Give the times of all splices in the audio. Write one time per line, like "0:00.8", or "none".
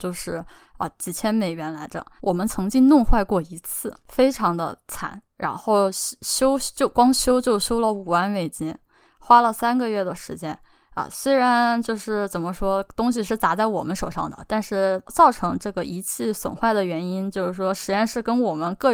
0:02.2
0:15.1